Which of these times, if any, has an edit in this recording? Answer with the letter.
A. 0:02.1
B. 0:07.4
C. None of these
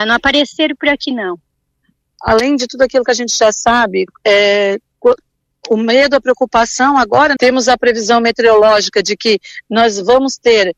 B